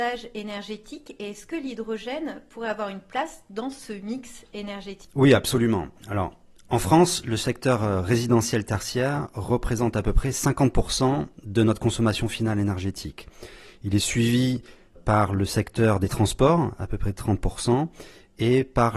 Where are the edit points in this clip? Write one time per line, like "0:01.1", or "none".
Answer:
0:15.0